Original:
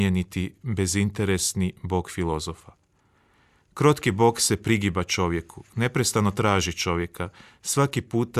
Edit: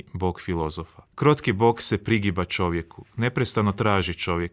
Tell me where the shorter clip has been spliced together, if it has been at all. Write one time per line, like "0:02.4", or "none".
0:01.0

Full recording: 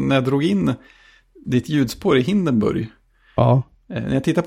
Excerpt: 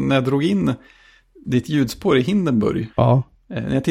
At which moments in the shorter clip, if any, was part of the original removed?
0:02.9

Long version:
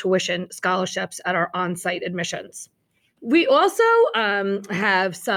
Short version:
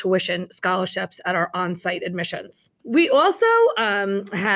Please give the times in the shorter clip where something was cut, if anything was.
0:02.8

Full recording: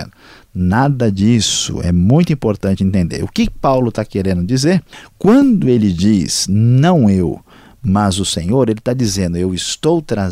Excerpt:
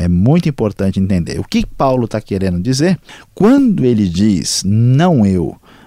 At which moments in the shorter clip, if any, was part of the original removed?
none

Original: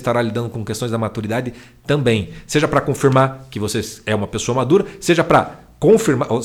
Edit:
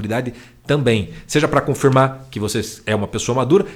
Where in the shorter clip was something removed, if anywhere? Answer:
none

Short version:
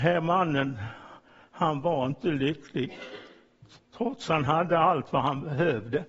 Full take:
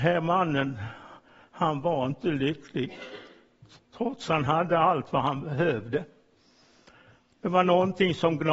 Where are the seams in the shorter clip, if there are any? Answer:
none

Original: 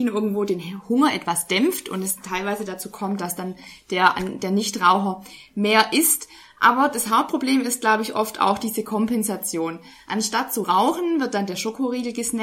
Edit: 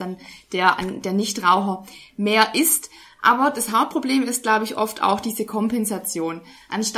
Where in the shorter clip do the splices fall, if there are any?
none

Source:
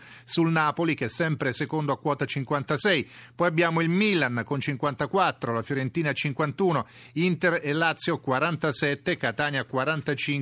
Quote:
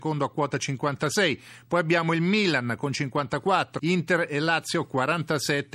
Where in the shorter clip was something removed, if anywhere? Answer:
0:03.8

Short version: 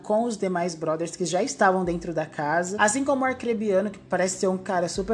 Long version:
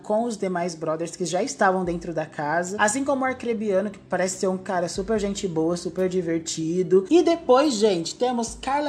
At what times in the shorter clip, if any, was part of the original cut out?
none

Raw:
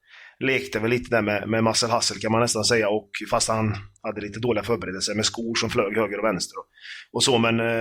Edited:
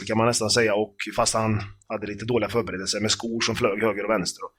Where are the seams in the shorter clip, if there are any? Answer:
none

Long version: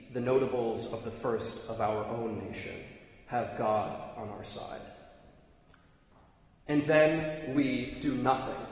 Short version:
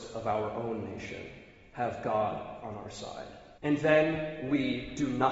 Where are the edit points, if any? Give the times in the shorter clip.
0:03.6

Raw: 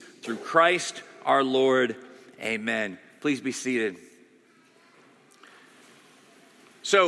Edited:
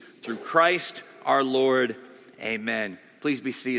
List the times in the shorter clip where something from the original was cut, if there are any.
none

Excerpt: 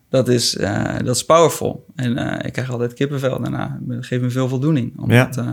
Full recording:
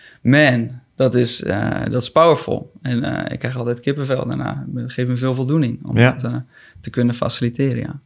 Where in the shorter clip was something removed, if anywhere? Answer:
none

